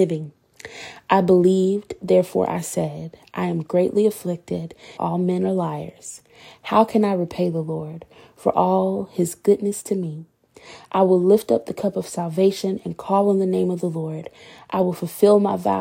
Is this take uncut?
no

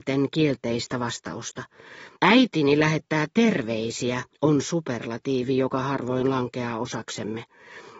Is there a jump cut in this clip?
yes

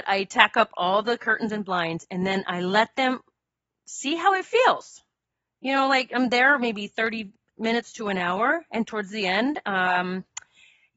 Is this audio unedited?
yes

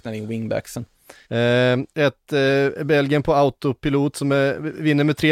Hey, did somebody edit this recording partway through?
yes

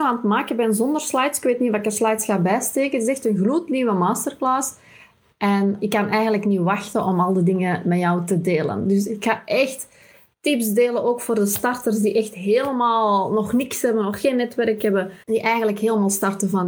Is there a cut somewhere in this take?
yes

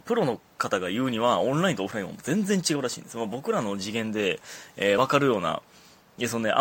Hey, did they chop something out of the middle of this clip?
no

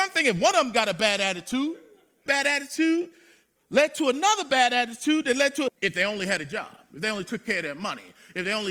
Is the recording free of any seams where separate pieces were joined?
no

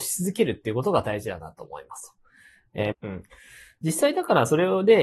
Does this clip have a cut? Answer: yes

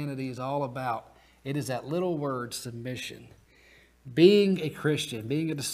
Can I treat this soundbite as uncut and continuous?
yes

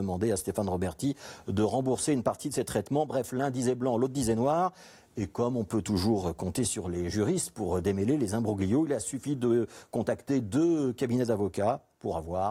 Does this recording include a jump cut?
no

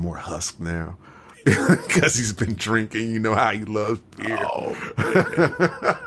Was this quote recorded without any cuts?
yes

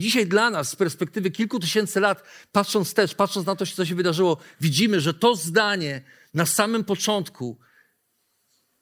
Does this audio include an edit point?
no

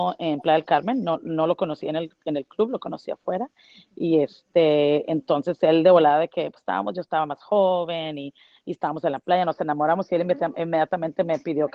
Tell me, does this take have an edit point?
no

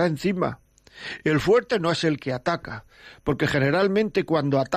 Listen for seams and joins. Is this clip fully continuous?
yes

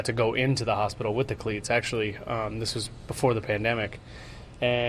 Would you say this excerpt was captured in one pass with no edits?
yes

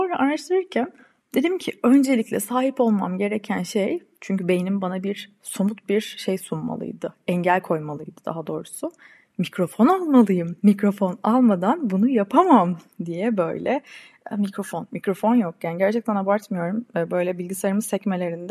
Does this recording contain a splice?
yes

